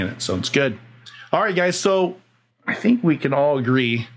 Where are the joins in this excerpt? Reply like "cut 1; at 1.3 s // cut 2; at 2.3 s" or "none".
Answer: none